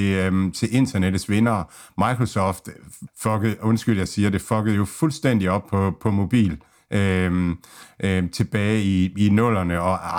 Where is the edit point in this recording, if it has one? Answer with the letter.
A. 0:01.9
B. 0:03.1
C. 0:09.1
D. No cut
B